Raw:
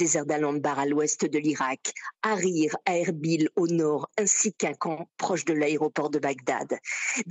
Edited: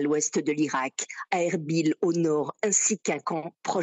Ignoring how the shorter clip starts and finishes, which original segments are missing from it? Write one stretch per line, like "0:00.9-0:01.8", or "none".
0:02.2-0:02.8